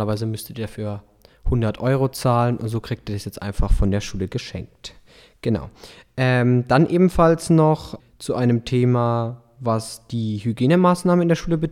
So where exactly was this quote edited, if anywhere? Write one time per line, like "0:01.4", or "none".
0:08.0